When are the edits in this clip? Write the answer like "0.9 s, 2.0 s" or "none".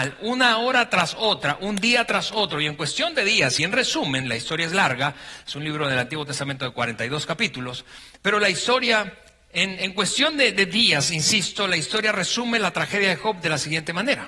none